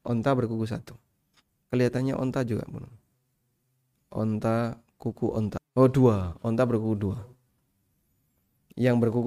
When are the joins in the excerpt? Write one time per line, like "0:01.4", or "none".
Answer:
none

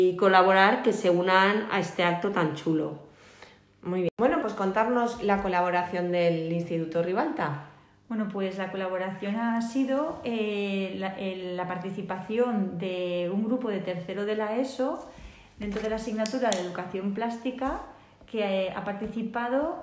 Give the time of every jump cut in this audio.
0:04.4

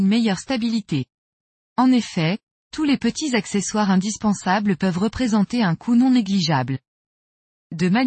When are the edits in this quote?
0:01.6

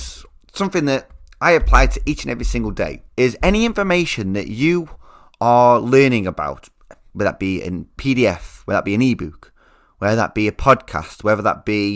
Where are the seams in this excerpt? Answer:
0:03.1

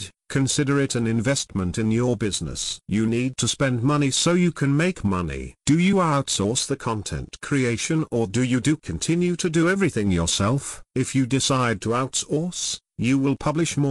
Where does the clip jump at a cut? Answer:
0:05.6

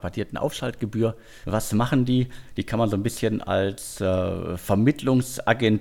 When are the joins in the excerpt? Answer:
0:01.4

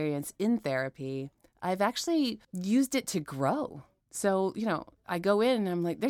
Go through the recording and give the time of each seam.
0:02.4

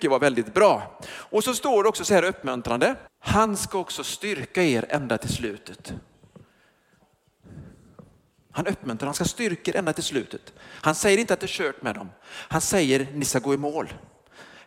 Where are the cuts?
0:03.1

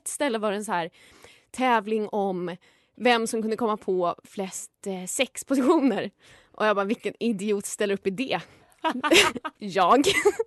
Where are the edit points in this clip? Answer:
none

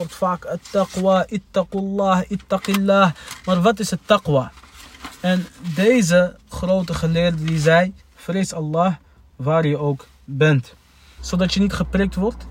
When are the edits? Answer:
0:08.0
0:11.2

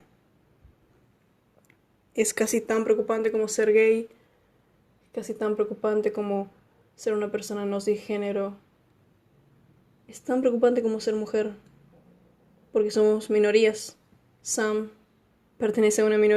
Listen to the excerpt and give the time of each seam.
none

